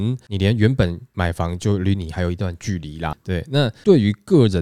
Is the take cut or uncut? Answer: cut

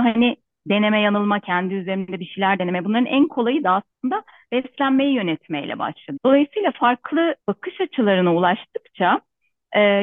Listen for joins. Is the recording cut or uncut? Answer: cut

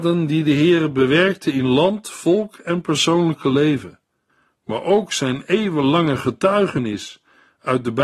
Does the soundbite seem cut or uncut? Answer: uncut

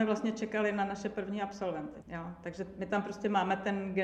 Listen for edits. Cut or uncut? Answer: cut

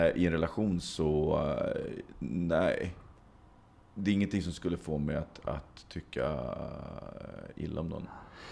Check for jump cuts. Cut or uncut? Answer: uncut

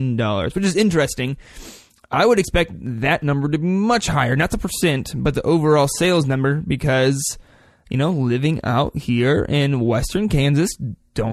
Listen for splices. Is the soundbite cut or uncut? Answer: uncut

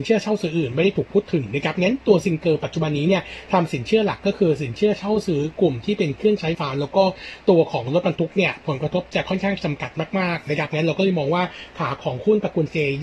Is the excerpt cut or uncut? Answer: cut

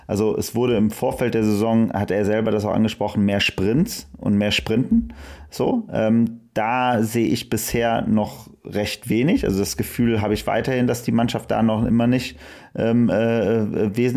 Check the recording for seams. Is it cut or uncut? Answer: uncut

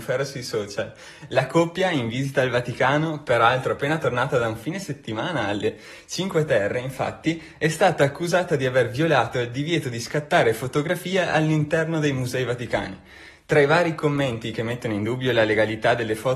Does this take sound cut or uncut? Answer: uncut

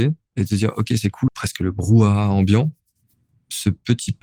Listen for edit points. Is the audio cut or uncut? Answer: cut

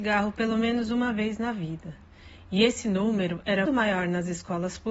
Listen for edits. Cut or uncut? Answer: cut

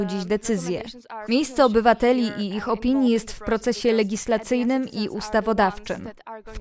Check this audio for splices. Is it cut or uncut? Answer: cut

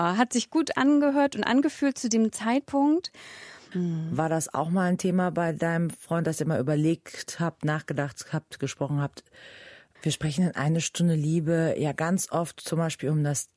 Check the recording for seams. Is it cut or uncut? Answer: cut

